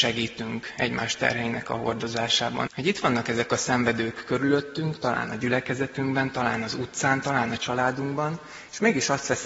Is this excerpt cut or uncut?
cut